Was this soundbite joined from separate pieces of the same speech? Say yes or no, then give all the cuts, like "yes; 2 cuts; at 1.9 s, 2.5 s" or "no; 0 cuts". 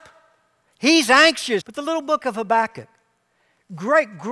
yes; 1 cut; at 1.6 s